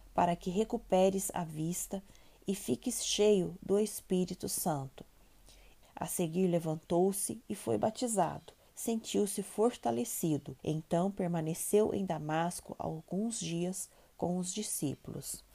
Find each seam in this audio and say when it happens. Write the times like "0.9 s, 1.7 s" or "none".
5.8 s, 8.7 s, 10.6 s